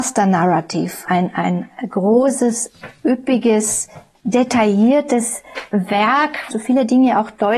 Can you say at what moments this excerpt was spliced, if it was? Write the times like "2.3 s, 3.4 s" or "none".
1.0 s, 6.5 s